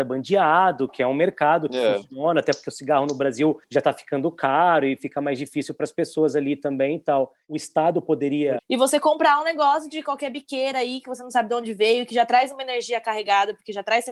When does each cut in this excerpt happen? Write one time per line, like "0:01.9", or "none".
0:03.6
0:08.6